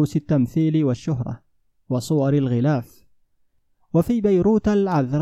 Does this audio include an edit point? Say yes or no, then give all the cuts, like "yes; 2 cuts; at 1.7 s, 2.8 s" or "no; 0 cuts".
no; 0 cuts